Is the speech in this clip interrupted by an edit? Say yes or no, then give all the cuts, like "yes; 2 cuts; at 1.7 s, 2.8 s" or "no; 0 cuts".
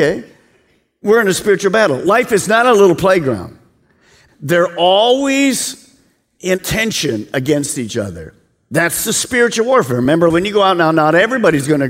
yes; 2 cuts; at 4.3 s, 10.3 s